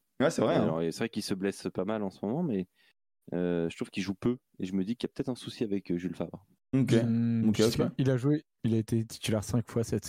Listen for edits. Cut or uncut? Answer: uncut